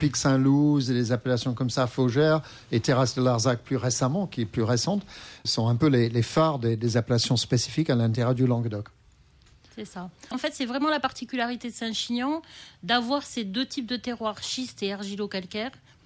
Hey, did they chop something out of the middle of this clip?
yes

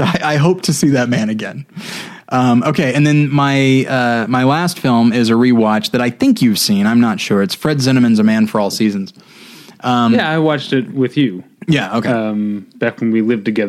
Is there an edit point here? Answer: no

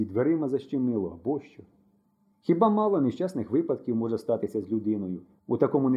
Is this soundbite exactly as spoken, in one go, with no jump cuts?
yes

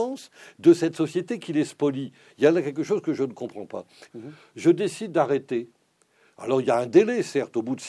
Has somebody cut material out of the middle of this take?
yes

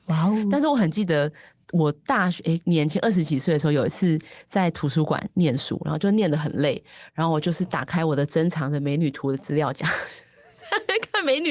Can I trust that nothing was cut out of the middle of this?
yes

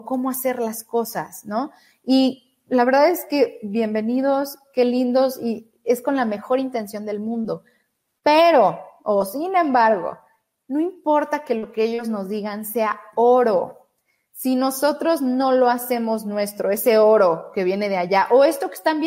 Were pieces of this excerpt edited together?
no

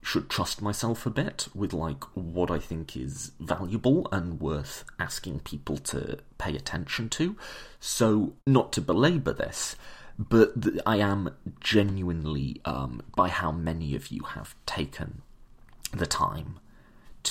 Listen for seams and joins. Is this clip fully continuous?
no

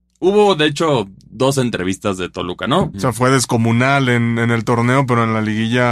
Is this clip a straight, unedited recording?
no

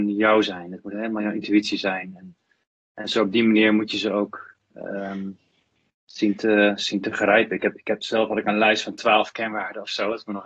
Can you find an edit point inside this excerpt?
no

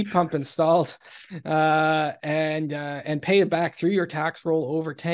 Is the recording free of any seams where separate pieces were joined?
yes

